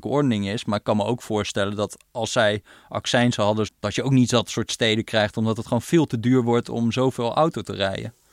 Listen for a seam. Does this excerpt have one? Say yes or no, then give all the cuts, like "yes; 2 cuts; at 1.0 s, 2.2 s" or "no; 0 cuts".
yes; 1 cut; at 3.7 s